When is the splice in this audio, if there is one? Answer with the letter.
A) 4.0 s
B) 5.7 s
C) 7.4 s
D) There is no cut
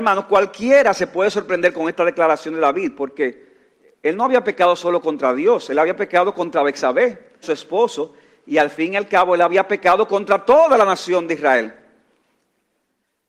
C